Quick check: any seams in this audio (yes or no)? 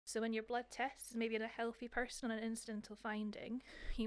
no